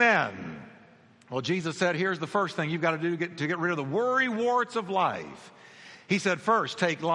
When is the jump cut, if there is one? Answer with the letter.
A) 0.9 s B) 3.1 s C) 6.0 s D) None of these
D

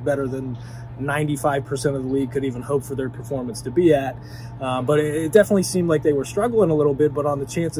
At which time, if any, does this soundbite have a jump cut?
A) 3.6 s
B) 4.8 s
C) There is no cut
C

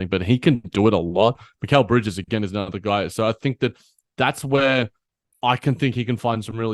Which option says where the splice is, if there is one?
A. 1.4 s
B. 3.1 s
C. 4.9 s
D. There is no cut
D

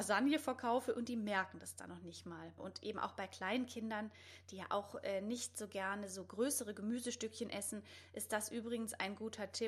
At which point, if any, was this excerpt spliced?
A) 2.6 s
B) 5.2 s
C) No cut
A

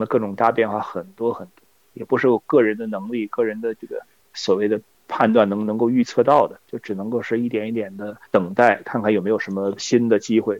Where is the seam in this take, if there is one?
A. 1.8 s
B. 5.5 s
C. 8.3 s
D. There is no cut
C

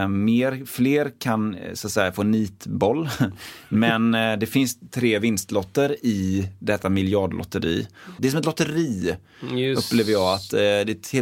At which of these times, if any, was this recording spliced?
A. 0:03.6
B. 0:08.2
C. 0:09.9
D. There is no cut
B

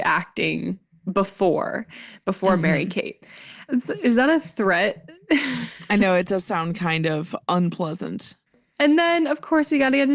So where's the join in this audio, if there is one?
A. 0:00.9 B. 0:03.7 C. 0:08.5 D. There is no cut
B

